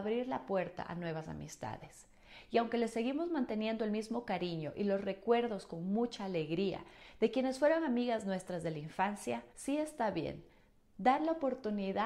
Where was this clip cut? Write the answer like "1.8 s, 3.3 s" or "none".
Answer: 9.5 s